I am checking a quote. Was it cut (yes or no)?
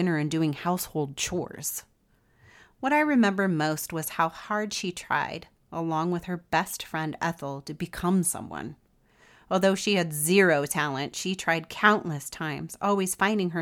no